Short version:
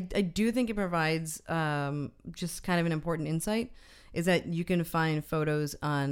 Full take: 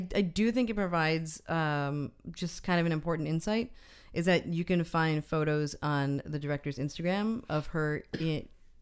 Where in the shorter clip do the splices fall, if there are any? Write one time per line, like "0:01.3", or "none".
none